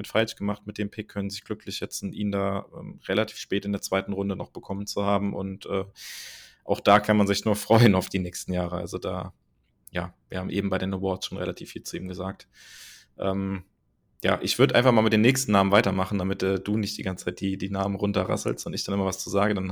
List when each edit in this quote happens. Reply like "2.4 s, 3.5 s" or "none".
none